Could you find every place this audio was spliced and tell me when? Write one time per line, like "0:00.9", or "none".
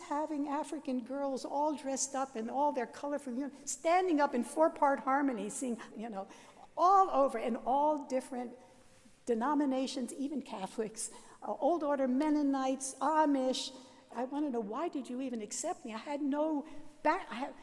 0:05.9
0:14.1